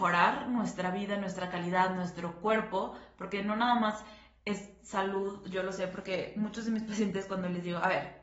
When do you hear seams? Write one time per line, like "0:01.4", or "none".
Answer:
none